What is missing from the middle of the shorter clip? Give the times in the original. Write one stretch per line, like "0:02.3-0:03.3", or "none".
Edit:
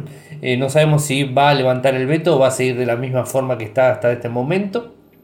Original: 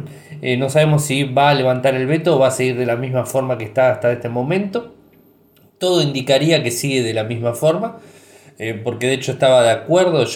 none